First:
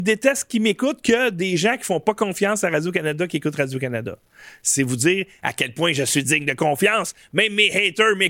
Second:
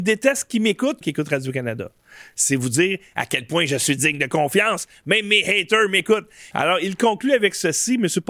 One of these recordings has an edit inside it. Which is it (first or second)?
second